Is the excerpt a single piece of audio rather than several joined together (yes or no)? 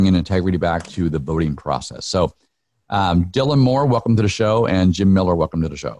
yes